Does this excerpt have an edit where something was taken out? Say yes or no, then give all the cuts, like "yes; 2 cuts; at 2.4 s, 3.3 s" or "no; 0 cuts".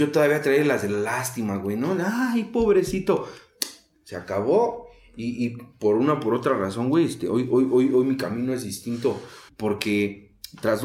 yes; 1 cut; at 9.5 s